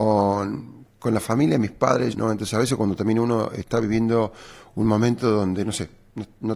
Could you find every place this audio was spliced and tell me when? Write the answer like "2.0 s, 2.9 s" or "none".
2.1 s